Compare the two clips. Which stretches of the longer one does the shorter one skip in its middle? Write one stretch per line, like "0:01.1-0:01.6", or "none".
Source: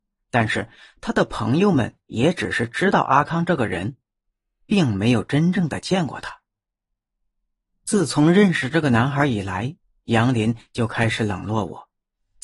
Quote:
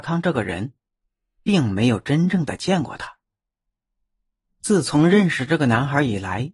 none